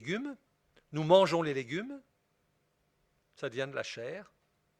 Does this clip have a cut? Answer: no; 0 cuts

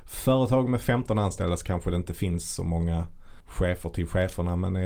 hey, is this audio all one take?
no; 1 cut; at 3.4 s

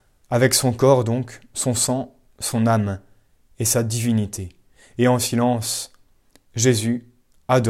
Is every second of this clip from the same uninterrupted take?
yes; 0 cuts

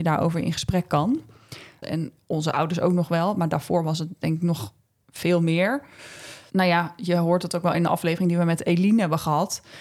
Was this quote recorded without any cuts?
no; 1 cut; at 1.8 s

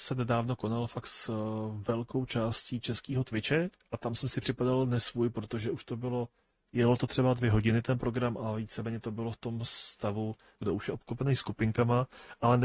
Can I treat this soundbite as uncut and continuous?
no; 1 cut; at 10.6 s

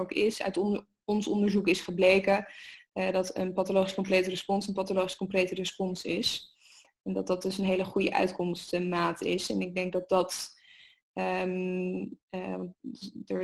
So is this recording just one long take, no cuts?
yes; 0 cuts

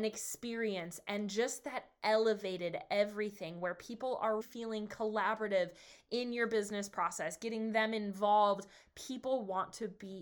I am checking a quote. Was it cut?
yes; 1 cut; at 4.4 s

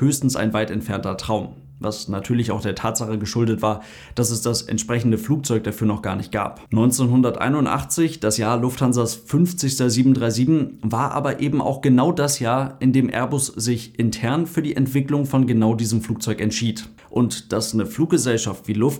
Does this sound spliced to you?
yes; 2 cuts; at 6.7 s, 17.0 s

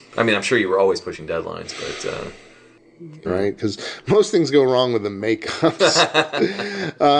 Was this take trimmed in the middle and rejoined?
yes; 1 cut; at 3.2 s

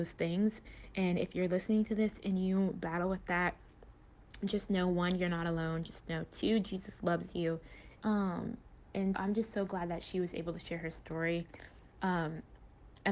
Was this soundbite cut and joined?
yes; 2 cuts; at 8.0 s, 9.1 s

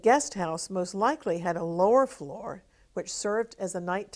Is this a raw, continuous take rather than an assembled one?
yes; 0 cuts

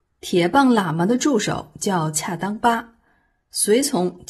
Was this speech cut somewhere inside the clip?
no; 0 cuts

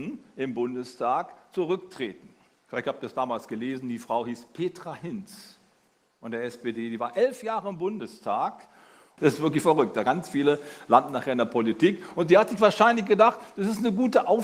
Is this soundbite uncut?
no; 1 cut; at 9.2 s

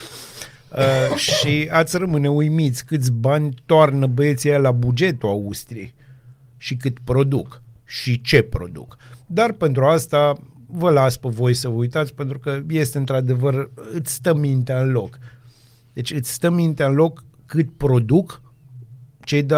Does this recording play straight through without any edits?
yes; 0 cuts

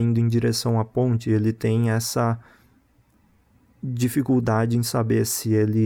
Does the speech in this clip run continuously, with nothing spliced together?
yes; 0 cuts

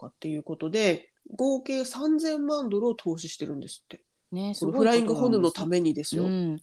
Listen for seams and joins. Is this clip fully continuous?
yes; 0 cuts

